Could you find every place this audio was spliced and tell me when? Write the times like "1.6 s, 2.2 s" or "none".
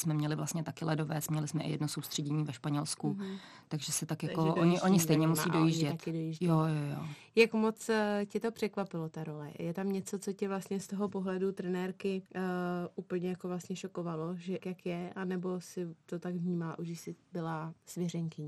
12.3 s, 14.6 s